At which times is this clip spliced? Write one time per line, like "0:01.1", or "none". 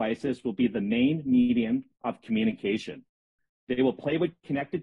0:03.6